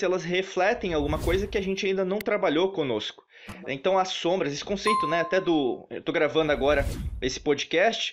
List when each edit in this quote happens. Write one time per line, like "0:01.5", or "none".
none